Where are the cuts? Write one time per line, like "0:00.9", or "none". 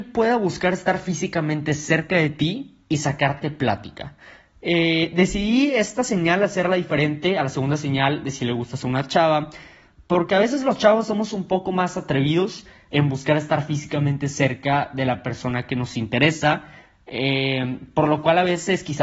none